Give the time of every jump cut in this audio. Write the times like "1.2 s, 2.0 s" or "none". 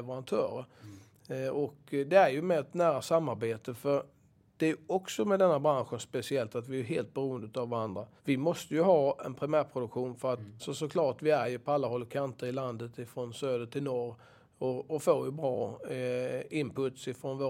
8.2 s, 10.6 s